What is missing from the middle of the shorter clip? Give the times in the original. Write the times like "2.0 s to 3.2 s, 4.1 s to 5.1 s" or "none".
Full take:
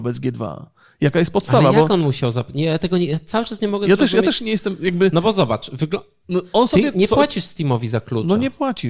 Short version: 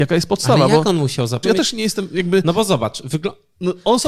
2.5 s to 4.1 s